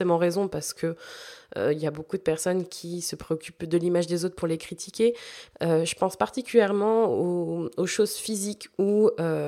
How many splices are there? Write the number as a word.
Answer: one